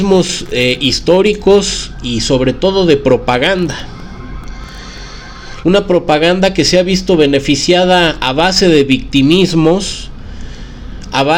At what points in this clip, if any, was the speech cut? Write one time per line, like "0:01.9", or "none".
0:05.6